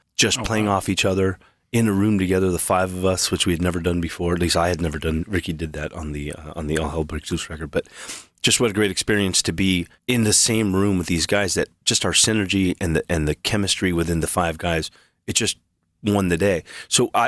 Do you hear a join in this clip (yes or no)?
no